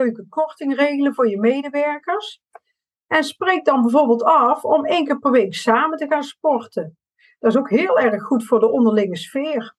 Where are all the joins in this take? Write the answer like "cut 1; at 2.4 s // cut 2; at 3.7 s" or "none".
none